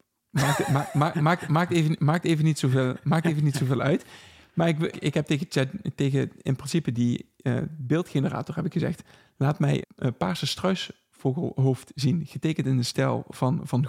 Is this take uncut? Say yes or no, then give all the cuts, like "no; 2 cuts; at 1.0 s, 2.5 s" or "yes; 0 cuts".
no; 2 cuts; at 4.9 s, 9.8 s